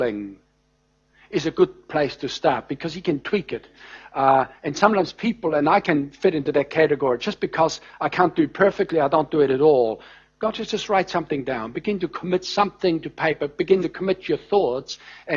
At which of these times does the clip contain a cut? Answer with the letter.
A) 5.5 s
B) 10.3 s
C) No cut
C